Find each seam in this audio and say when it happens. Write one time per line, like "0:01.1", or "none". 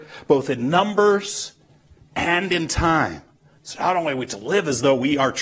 0:03.6